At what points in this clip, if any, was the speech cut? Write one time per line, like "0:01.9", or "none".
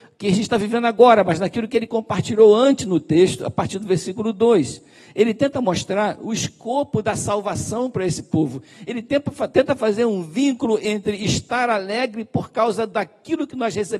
none